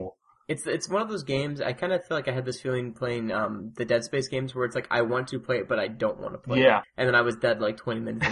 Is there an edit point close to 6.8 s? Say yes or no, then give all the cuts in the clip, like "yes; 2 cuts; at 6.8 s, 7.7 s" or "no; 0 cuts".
yes; 1 cut; at 6.8 s